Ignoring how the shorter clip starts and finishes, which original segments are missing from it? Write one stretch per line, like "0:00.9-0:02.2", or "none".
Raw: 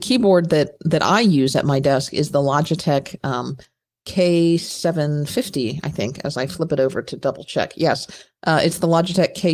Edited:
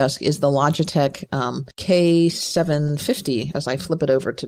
0:03.6-0:04.0
0:05.8-0:06.2